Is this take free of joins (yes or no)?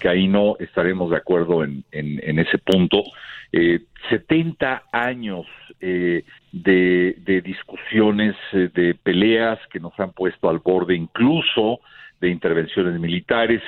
yes